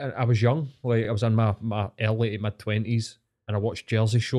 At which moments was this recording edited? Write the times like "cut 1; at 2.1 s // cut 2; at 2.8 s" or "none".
none